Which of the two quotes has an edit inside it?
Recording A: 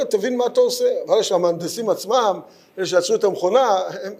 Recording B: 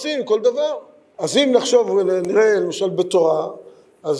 B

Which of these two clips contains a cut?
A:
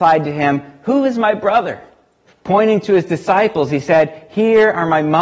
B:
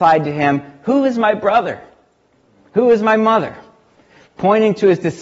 A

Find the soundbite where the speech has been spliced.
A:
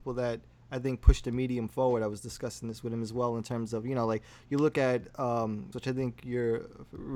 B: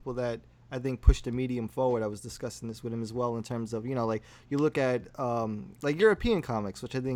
A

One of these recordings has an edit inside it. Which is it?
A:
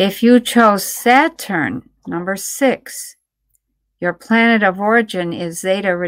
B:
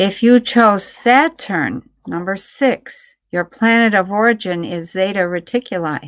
B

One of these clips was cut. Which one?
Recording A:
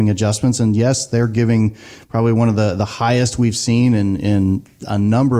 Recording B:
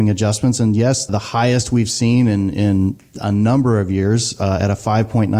B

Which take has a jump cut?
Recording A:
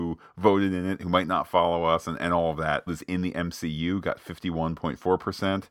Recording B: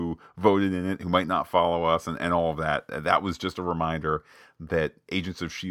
A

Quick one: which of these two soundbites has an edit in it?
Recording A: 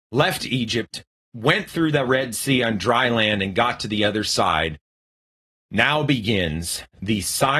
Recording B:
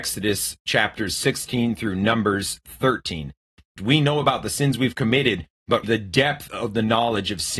B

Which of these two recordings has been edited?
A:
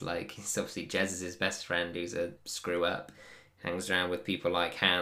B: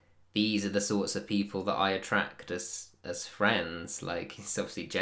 A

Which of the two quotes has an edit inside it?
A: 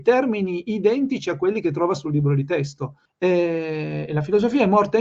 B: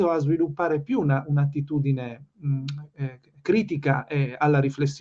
A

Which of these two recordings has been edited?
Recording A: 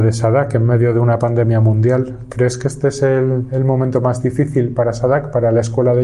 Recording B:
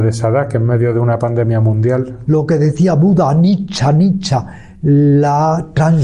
B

